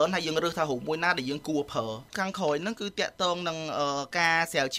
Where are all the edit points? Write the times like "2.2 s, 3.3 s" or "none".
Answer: 2.1 s